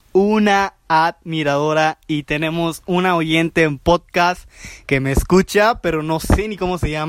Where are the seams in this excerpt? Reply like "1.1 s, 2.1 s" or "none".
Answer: none

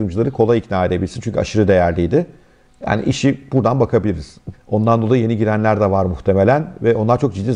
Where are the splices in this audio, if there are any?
4.5 s

